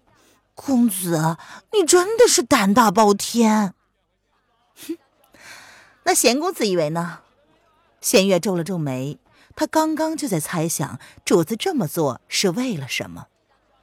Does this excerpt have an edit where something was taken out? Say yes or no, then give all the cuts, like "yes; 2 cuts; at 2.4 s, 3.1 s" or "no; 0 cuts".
yes; 1 cut; at 8.0 s